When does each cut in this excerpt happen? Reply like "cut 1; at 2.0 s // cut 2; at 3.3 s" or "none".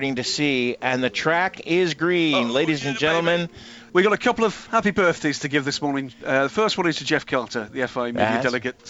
cut 1; at 3.9 s